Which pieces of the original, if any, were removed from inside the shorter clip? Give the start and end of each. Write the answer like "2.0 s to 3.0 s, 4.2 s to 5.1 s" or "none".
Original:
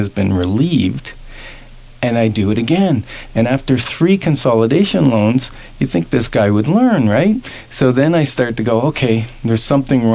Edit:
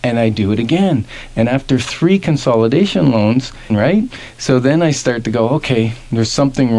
5.7 s to 7.0 s